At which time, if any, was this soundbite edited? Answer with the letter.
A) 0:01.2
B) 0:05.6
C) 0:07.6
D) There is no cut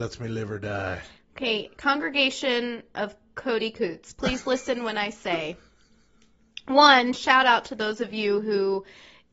D